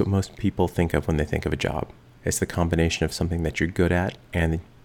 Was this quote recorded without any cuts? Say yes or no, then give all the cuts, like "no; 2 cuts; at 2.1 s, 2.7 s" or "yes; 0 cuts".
yes; 0 cuts